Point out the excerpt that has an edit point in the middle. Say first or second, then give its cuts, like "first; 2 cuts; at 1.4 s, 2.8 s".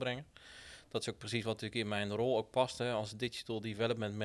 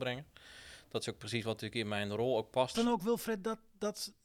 second; 1 cut; at 2.7 s